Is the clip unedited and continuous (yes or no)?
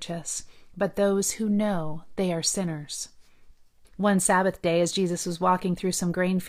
no